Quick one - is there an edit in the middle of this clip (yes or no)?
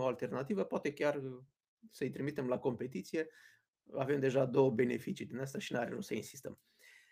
no